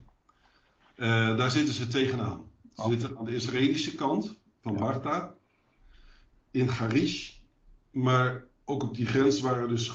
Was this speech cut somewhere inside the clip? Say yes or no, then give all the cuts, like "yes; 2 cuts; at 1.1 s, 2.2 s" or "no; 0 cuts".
no; 0 cuts